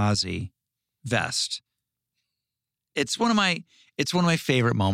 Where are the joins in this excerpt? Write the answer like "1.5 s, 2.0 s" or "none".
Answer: none